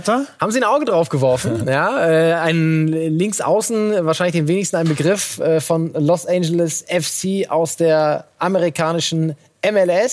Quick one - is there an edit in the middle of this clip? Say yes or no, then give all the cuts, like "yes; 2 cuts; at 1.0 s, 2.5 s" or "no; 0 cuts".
no; 0 cuts